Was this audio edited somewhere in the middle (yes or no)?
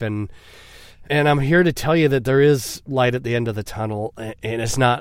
yes